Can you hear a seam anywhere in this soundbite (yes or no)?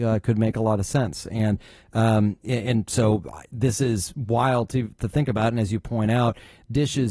no